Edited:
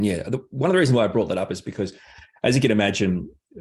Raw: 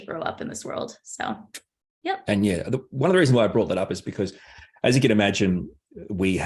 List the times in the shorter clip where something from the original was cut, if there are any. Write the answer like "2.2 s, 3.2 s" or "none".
none